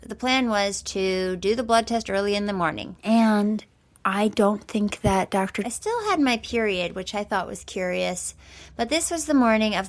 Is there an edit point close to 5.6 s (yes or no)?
yes